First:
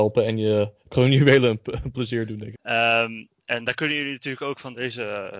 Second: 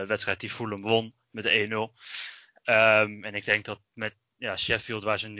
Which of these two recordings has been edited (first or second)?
first